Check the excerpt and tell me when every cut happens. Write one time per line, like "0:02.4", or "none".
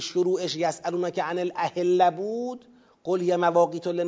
none